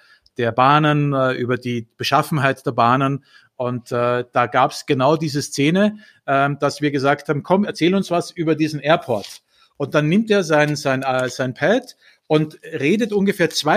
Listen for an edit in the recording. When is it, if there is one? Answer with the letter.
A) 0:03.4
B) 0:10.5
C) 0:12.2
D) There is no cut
D